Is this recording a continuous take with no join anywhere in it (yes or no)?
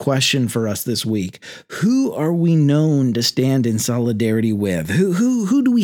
yes